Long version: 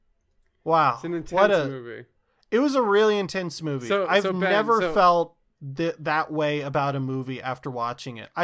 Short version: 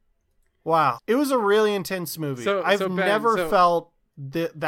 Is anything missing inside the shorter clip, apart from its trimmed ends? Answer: yes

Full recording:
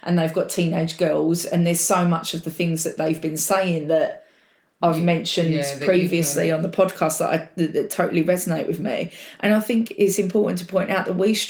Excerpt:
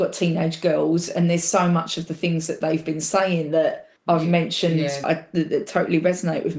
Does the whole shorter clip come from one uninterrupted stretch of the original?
no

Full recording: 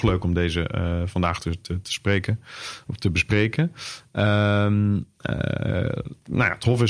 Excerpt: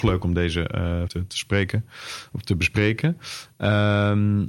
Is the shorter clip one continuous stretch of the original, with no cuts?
no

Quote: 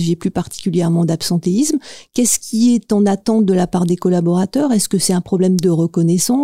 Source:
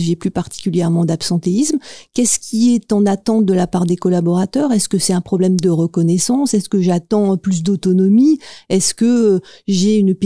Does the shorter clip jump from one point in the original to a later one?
no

